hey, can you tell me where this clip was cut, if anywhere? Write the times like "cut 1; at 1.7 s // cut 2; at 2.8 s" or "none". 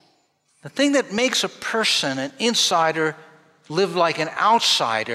none